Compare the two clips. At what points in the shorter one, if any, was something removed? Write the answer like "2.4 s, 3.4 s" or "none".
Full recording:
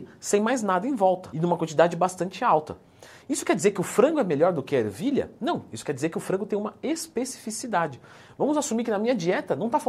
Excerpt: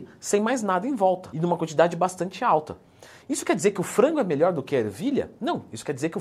none

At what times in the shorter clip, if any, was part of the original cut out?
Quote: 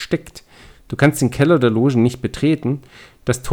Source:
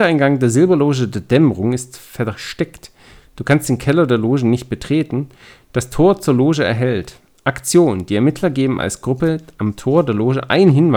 none

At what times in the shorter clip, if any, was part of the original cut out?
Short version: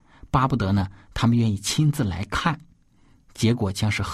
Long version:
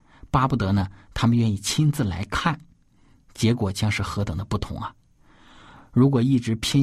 none

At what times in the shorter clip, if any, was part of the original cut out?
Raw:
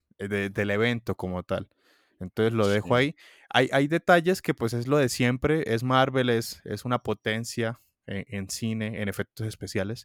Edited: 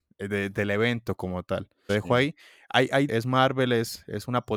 1.9 s, 3.1 s

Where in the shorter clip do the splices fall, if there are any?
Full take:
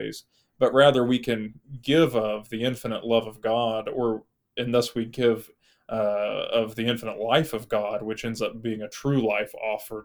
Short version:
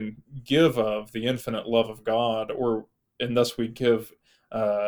none

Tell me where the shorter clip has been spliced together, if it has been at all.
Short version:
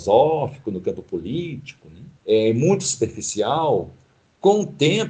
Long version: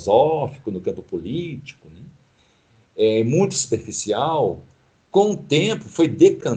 2.2 s

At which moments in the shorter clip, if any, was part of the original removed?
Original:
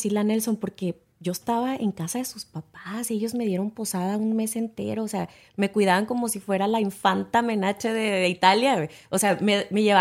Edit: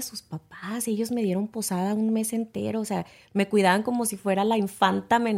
none

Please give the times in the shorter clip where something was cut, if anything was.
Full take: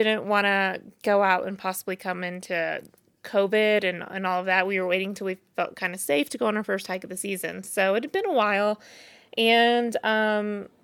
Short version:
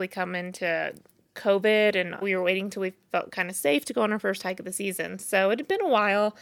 2.2 s

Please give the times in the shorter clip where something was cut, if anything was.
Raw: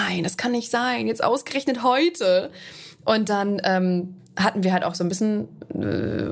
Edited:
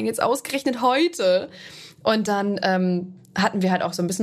none

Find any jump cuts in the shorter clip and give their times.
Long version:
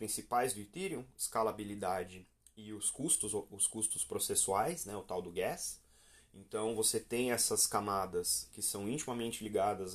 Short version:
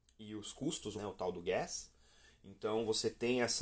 0.9 s

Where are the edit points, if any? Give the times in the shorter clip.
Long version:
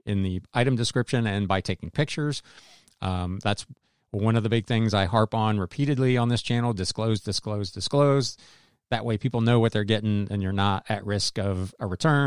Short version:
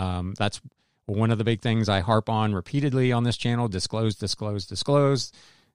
none

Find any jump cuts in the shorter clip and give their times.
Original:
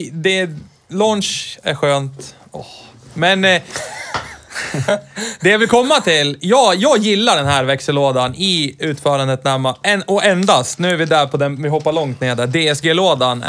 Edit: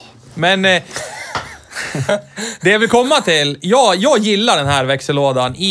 none

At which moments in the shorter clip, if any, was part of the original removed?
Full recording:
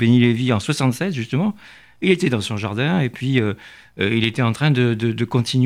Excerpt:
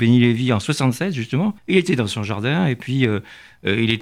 1.6 s

